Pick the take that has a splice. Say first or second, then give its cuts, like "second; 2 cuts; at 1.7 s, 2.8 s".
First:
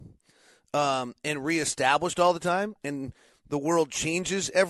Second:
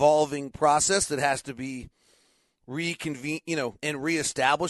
second; 1 cut; at 3.8 s